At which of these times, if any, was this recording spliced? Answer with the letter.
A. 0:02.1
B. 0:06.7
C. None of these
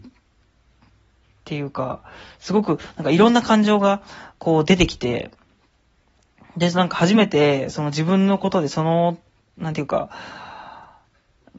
C